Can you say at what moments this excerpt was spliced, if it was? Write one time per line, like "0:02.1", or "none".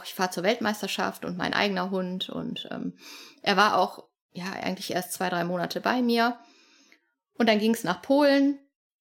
none